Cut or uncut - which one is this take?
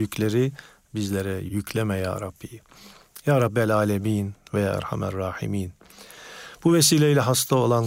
uncut